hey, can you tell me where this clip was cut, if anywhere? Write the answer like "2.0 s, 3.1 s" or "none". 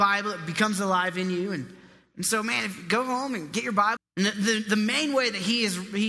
4.0 s